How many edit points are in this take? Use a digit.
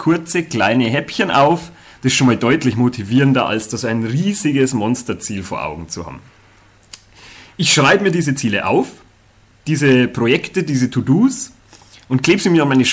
0